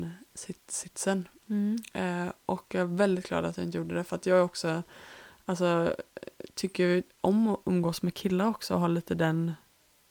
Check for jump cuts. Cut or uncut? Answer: uncut